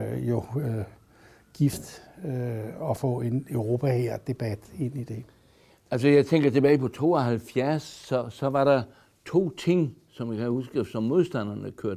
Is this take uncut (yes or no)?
yes